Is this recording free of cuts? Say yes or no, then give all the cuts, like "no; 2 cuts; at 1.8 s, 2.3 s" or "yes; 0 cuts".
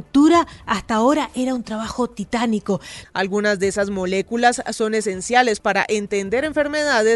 no; 1 cut; at 3.0 s